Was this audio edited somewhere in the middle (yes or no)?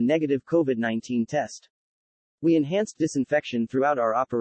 no